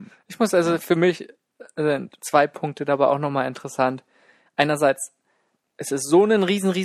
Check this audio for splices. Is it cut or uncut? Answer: uncut